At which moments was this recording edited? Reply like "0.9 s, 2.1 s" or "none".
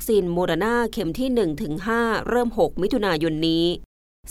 none